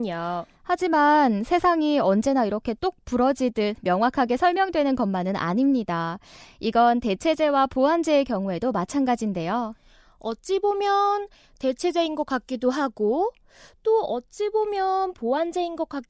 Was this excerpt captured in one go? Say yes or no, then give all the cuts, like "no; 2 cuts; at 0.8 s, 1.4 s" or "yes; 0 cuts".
yes; 0 cuts